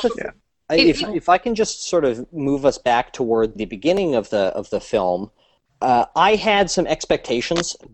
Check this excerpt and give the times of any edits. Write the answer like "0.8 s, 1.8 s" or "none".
3.6 s